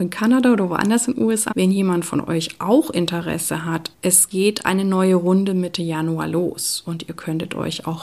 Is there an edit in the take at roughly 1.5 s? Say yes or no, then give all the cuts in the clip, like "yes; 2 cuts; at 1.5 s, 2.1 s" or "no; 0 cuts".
yes; 2 cuts; at 1.5 s, 3.9 s